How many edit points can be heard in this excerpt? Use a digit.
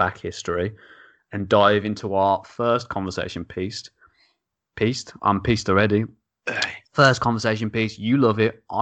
0